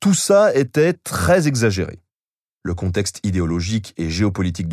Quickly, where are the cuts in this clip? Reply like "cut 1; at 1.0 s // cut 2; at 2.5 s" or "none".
cut 1; at 2.6 s